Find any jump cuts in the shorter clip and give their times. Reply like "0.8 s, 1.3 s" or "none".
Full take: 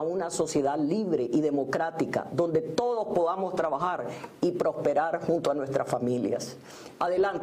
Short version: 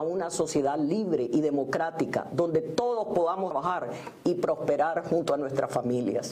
3.5 s